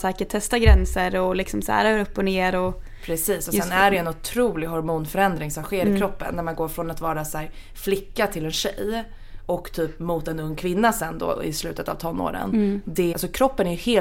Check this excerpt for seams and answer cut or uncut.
cut